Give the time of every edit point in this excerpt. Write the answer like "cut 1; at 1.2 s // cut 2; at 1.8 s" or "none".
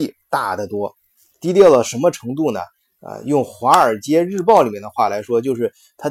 cut 1; at 1.3 s